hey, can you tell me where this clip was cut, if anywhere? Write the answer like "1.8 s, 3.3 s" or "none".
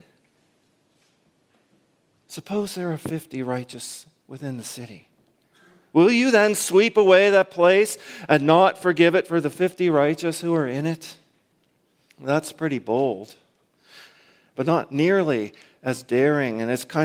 none